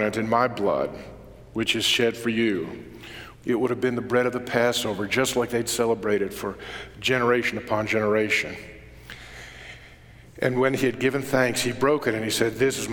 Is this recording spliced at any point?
yes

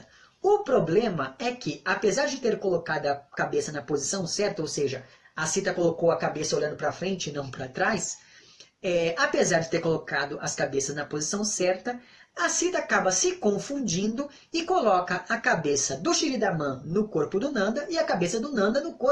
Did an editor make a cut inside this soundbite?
no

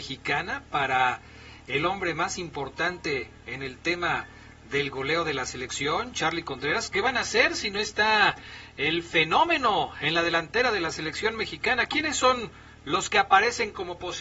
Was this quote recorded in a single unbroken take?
yes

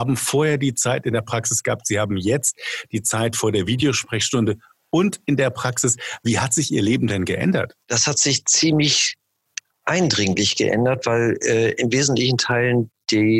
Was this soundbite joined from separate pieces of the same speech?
yes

